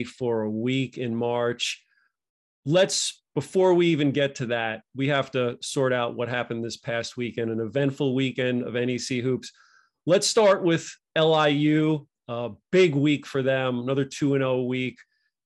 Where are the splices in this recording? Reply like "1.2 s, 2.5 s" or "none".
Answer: none